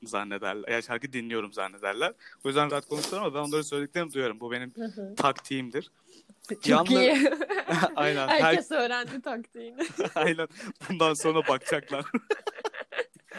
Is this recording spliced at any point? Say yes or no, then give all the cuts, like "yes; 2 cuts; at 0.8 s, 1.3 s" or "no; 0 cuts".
yes; 1 cut; at 2.7 s